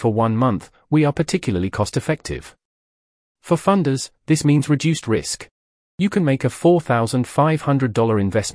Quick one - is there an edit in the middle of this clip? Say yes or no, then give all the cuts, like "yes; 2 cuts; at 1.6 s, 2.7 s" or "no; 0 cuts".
no; 0 cuts